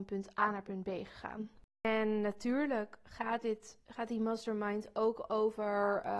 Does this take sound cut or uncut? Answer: uncut